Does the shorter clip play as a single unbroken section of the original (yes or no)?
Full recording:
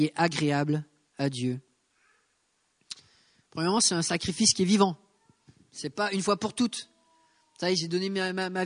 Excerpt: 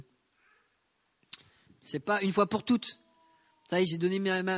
no